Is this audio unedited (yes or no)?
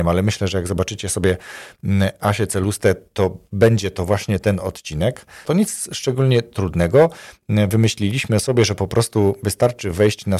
no